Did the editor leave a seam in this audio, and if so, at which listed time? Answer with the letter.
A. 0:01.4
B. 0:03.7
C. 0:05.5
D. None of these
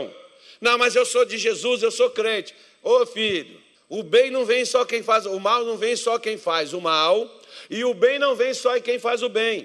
B